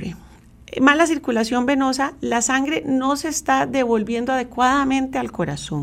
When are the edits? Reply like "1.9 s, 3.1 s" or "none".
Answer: none